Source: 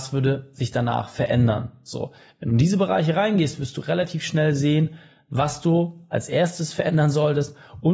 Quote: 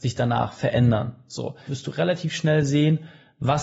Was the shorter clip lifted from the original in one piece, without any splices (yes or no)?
no